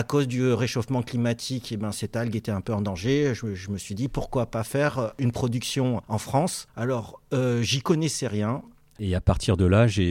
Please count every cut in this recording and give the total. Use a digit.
1